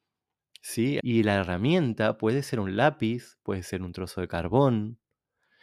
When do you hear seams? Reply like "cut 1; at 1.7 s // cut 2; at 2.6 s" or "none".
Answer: cut 1; at 1.0 s